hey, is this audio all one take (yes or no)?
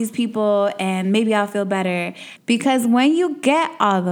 no